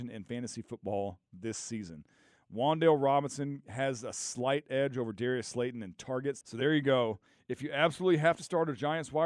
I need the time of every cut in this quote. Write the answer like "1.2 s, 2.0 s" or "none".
6.4 s